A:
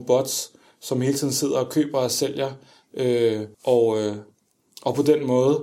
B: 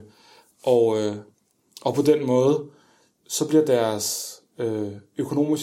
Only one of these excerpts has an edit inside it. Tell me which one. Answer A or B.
A